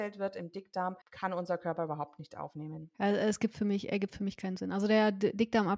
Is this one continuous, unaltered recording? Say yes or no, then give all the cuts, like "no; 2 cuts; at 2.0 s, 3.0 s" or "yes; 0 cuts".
no; 1 cut; at 1.0 s